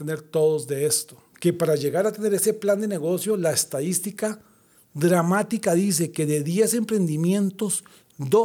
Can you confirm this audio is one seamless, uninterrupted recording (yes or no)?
yes